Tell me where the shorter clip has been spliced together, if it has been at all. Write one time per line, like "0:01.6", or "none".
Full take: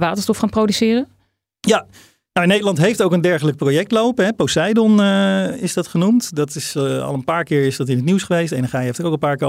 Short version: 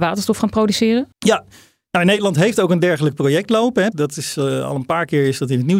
0:01.1
0:03.9